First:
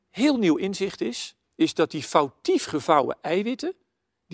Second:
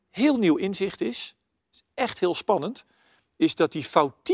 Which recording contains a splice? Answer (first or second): first